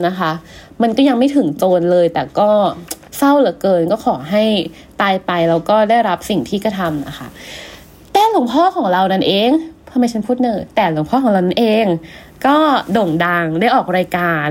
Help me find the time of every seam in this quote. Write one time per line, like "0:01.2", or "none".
0:03.0